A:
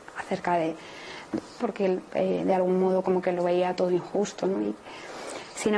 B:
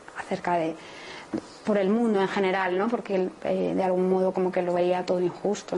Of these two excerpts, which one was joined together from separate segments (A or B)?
A